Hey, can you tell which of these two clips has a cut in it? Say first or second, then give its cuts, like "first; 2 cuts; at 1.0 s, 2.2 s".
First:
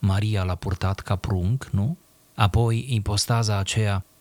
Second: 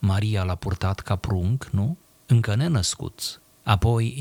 first; 1 cut; at 2.3 s